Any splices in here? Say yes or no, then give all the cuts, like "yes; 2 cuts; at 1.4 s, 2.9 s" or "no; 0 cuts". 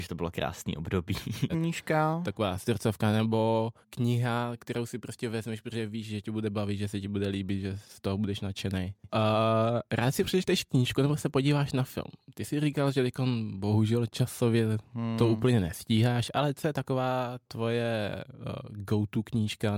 yes; 3 cuts; at 1.5 s, 3.8 s, 9.1 s